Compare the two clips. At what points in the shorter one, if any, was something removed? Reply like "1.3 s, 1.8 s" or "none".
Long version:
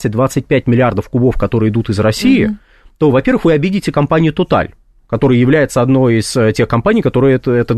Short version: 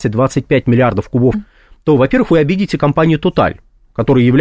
1.3 s